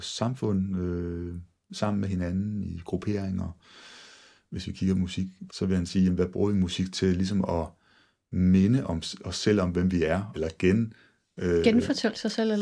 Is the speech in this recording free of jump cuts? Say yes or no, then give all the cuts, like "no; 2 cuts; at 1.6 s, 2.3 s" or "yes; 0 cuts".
no; 2 cuts; at 5.5 s, 10.3 s